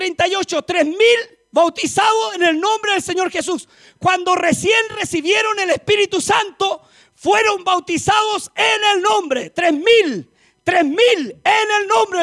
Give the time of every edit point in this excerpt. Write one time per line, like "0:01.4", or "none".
none